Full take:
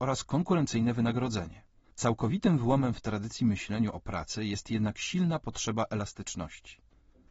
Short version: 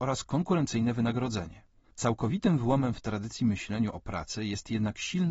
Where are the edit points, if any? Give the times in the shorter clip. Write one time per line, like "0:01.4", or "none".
none